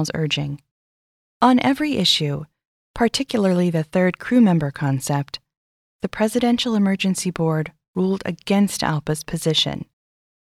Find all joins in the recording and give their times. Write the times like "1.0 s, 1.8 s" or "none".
1.3 s

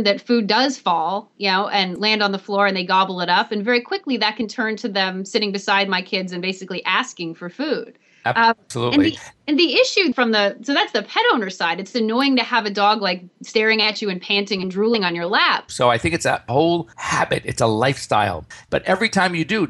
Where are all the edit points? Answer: 15.7 s, 18.6 s

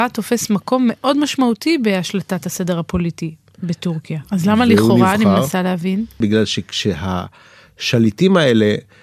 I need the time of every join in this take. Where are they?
4.2 s

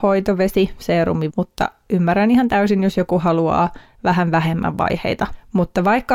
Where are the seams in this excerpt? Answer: 1.3 s

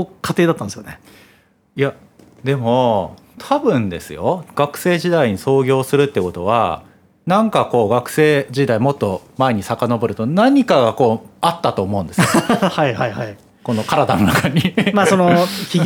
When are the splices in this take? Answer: none

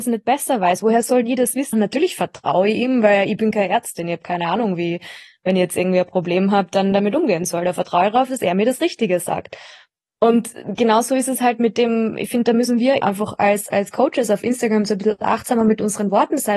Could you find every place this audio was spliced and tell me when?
1.7 s, 13.0 s

